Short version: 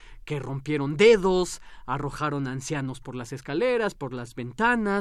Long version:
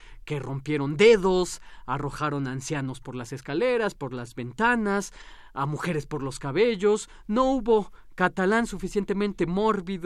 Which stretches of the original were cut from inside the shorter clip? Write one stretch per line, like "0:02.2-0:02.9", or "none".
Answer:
none